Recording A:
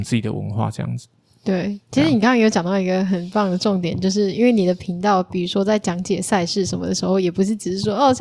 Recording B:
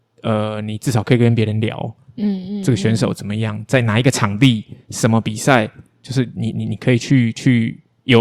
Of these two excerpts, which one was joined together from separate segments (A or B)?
B